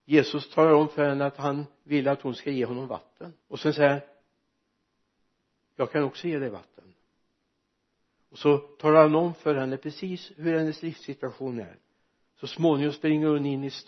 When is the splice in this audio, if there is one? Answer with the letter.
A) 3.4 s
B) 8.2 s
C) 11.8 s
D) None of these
A